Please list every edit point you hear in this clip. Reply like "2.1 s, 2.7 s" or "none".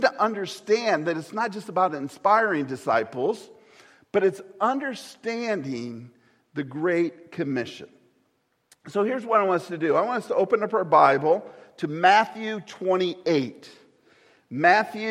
none